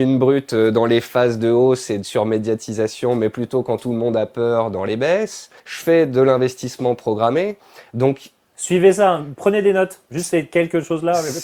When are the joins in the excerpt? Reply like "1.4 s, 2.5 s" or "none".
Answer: 5.6 s